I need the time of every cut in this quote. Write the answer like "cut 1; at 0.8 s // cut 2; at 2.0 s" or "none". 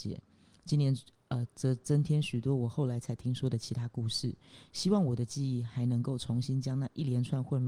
cut 1; at 1.5 s